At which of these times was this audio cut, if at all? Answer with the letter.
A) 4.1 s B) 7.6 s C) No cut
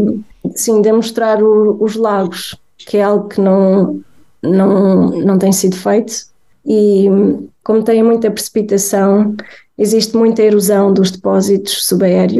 B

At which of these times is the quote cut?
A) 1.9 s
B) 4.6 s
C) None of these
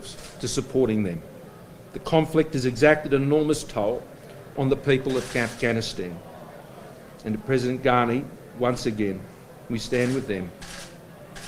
B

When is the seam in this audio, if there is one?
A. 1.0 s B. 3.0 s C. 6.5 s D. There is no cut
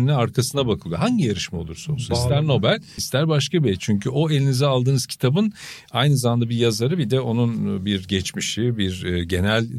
B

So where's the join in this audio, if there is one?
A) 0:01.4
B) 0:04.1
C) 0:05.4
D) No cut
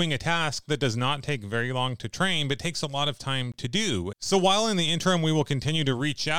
B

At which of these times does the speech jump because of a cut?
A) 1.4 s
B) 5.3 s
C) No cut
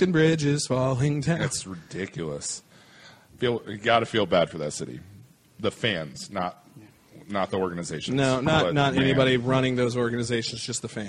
C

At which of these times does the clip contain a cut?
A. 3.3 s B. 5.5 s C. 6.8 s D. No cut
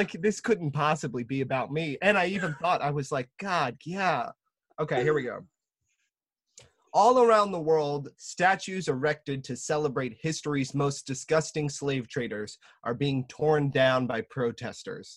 D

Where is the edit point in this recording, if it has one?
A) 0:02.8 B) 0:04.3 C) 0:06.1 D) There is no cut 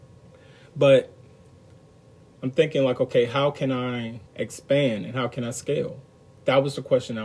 B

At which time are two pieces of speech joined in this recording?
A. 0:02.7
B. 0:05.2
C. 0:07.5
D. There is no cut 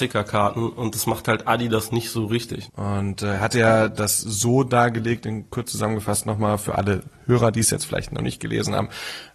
A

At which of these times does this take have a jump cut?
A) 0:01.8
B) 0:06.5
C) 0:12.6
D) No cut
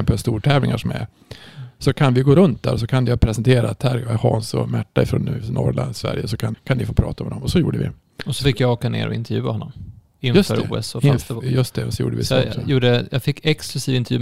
B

